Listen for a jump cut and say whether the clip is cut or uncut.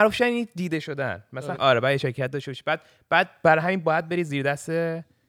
cut